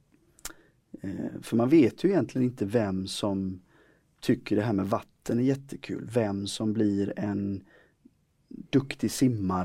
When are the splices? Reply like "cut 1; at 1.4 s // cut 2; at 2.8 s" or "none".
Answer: none